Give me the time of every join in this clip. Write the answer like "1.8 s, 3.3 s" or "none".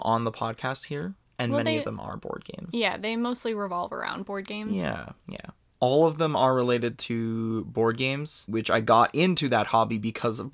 5.8 s, 8.5 s